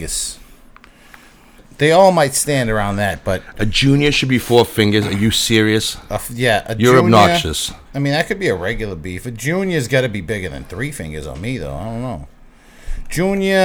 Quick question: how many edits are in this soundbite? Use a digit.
1